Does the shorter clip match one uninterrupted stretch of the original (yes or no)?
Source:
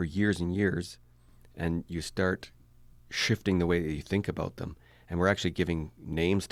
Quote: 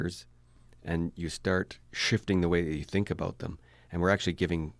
no